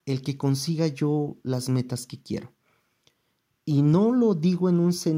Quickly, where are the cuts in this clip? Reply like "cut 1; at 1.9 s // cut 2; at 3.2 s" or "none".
none